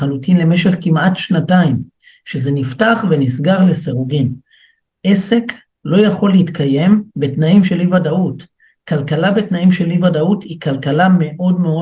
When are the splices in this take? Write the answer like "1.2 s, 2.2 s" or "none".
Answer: 7.1 s